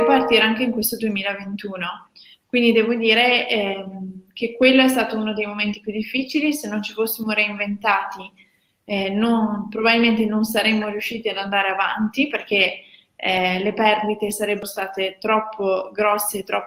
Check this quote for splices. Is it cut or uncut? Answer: uncut